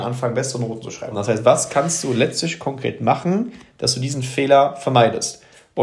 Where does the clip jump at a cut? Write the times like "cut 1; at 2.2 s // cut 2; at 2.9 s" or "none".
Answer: cut 1; at 1.1 s